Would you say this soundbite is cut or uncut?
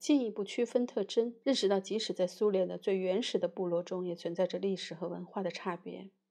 cut